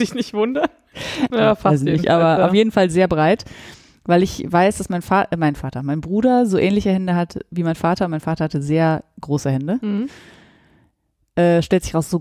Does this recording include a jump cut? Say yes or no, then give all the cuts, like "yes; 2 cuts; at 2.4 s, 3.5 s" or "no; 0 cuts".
yes; 1 cut; at 1.3 s